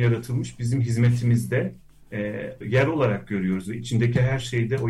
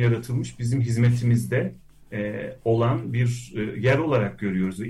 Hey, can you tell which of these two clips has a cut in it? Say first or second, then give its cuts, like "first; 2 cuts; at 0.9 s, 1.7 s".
first; 1 cut; at 2.6 s